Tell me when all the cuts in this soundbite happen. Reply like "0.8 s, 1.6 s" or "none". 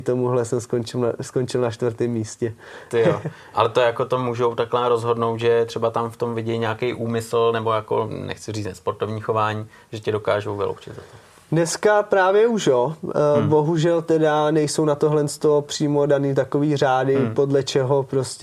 none